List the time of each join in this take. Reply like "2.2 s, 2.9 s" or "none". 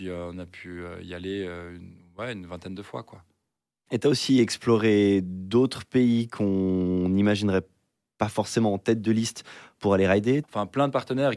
10.4 s

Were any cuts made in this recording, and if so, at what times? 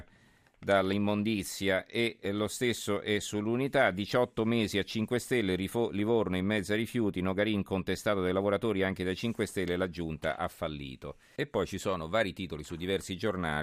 11.4 s

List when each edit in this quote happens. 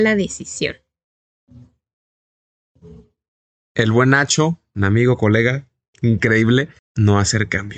6.8 s

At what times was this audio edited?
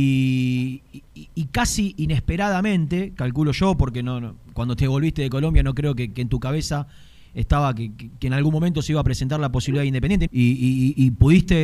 10.3 s

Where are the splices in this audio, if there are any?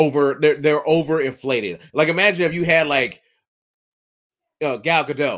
none

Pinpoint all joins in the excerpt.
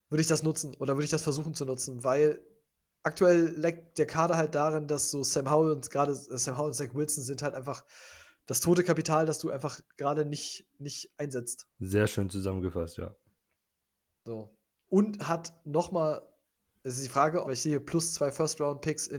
11.7 s, 17.4 s

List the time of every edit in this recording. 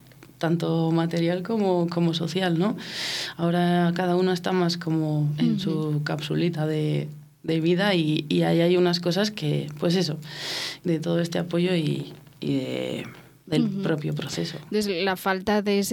10.8 s

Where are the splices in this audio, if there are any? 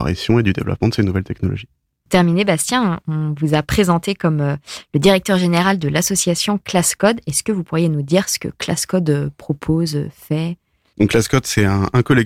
none

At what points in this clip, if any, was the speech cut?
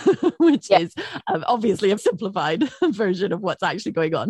2.0 s

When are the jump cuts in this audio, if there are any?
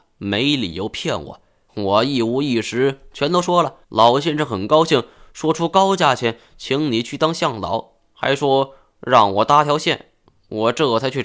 1.7 s, 3.8 s

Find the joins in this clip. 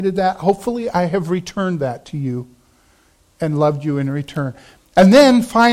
4.8 s

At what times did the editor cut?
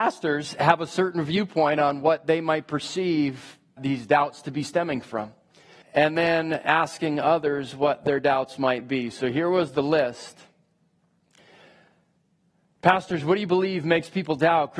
3.8 s, 5.8 s

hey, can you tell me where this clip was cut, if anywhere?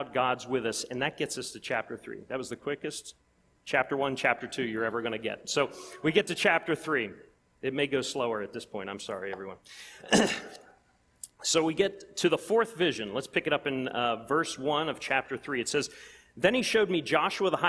none

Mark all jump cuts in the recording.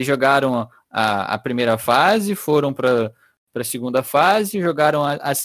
none

